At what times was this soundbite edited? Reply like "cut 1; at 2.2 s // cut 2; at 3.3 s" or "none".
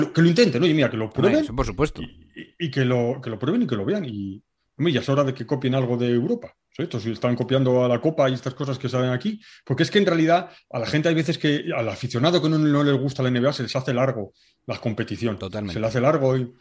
none